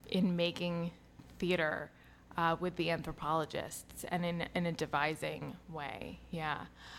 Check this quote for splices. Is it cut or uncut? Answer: uncut